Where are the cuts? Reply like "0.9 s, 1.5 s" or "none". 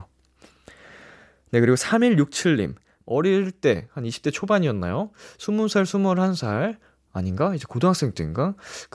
3.0 s